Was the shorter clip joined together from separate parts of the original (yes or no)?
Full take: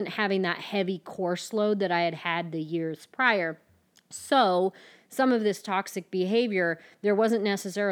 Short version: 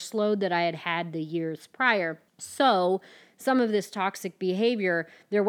yes